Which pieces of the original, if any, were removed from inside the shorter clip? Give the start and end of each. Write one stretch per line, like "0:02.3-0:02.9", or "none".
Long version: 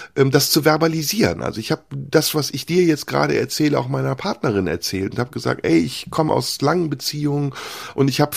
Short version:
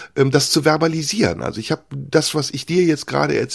none